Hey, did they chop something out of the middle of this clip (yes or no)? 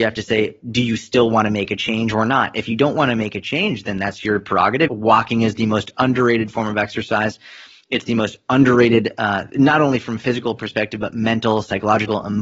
yes